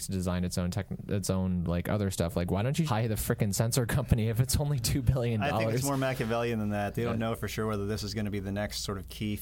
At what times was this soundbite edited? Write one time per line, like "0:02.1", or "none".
0:02.8